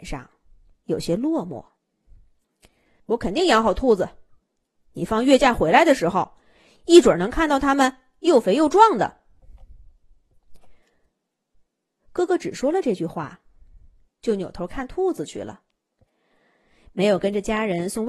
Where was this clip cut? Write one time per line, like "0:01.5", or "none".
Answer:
0:03.0